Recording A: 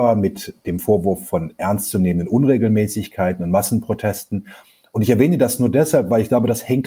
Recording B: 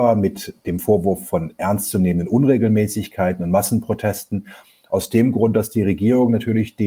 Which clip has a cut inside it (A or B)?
B